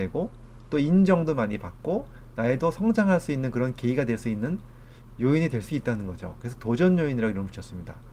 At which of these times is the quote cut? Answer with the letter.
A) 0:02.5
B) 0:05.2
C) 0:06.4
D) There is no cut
D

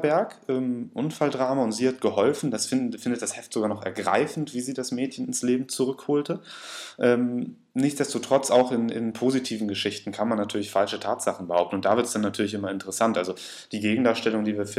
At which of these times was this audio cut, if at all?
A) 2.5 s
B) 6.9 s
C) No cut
C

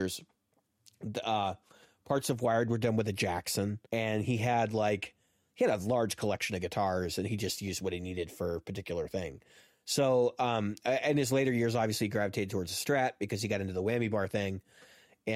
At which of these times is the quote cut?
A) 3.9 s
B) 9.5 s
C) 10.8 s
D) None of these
A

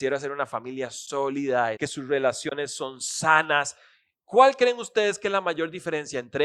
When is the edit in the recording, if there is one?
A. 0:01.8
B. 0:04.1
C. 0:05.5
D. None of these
A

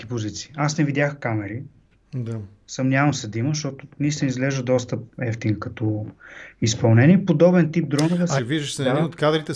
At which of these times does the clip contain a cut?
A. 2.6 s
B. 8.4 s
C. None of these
B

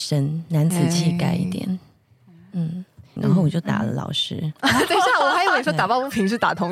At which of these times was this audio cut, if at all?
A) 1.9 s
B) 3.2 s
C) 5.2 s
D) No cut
B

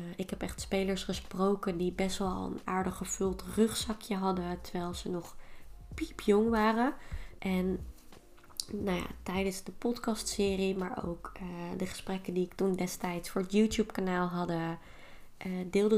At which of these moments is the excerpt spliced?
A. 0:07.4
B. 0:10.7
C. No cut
A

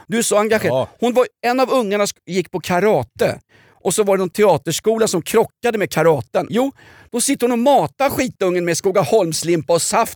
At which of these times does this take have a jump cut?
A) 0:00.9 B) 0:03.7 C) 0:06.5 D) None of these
C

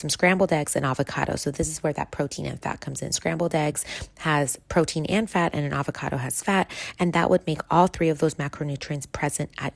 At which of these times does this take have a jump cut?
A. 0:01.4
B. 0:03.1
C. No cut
C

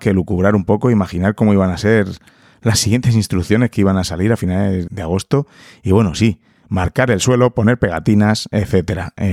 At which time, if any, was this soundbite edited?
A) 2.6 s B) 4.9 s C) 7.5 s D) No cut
B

